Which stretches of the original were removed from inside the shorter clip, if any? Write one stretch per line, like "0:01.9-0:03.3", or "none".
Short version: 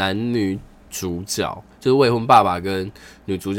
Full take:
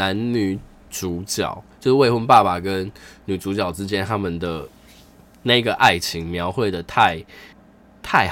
none